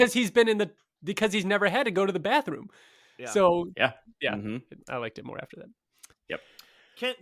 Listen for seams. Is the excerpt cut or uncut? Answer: uncut